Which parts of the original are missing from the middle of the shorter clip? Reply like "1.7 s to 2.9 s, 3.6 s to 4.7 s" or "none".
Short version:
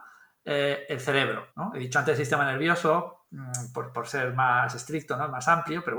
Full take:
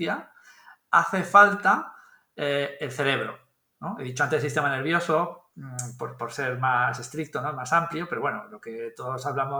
3.4 s to 3.7 s